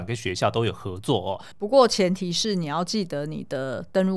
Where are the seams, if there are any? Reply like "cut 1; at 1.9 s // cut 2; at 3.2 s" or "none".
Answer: cut 1; at 1.5 s